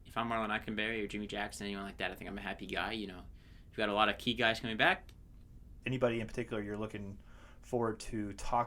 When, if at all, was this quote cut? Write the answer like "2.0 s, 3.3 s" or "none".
5.8 s